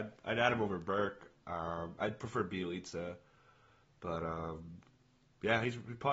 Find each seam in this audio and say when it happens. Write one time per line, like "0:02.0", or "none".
none